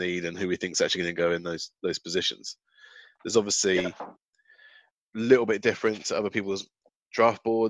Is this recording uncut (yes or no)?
yes